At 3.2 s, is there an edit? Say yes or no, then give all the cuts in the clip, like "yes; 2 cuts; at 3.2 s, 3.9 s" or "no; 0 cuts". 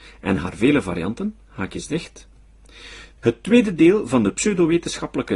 yes; 1 cut; at 3.2 s